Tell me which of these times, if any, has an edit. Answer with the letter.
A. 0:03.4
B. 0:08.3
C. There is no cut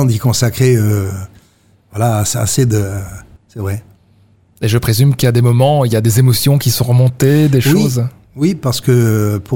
A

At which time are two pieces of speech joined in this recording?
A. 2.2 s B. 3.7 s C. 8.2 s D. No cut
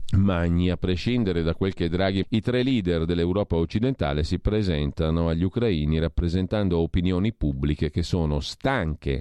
A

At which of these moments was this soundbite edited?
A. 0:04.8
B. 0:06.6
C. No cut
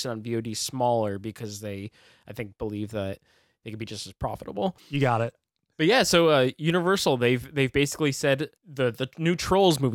A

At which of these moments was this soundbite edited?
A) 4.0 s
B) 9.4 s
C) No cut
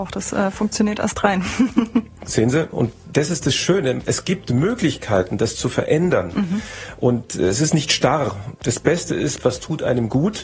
B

